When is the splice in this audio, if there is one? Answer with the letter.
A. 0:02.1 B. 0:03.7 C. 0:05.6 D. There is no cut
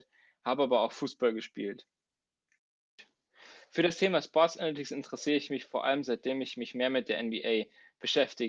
D